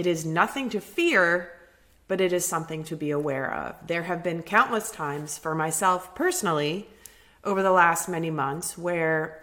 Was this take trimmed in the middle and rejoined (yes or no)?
no